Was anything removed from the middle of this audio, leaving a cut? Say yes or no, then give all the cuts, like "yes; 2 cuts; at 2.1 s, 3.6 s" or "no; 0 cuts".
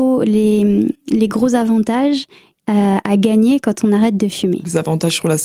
no; 0 cuts